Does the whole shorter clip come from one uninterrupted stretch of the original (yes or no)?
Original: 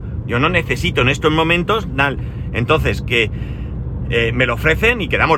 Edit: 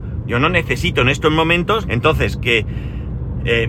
no